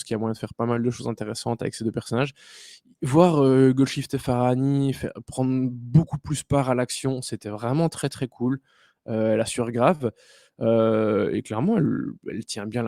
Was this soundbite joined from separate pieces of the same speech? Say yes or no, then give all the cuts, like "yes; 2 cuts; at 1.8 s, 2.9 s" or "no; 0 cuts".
no; 0 cuts